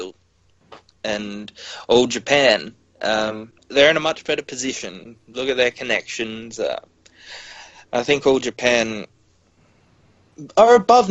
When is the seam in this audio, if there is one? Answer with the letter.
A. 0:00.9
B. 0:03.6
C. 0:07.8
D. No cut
B